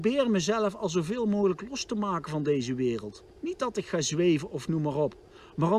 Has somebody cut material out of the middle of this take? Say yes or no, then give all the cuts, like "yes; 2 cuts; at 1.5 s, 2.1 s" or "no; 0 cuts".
yes; 1 cut; at 3.3 s